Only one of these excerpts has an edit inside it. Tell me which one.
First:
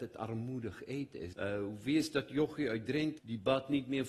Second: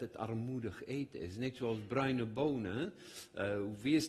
first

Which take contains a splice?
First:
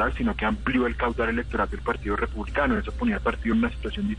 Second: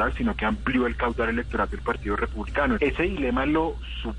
second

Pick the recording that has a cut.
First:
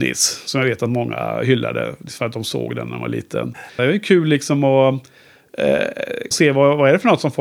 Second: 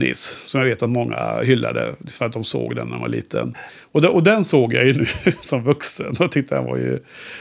first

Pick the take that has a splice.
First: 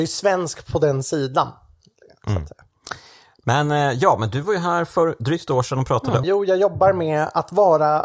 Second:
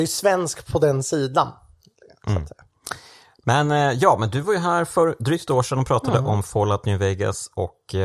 first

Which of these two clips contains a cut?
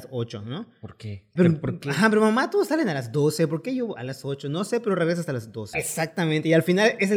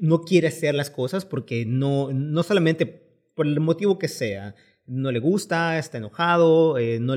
first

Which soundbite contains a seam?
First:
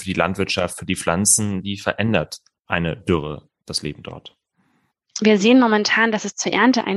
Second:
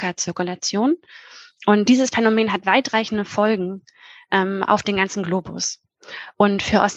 first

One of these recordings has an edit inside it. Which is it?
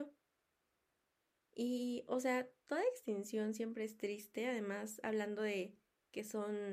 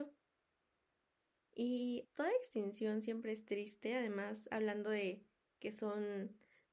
second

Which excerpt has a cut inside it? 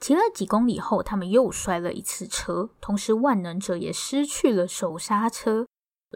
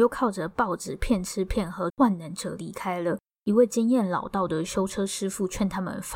second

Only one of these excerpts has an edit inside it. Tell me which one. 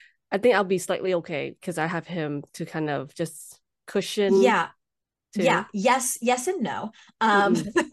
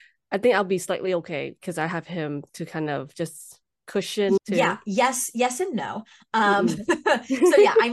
second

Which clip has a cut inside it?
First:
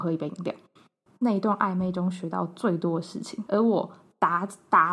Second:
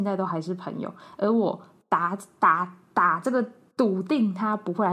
first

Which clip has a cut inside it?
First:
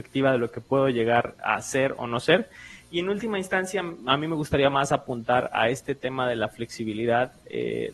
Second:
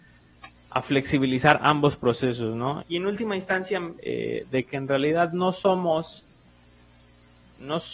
second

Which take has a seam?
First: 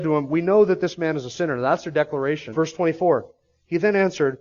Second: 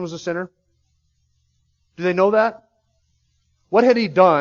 first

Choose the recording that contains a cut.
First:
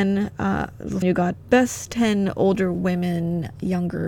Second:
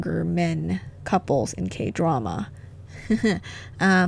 first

